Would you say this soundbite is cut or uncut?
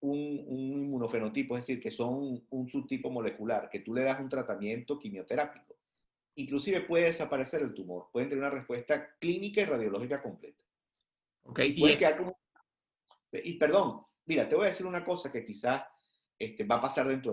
cut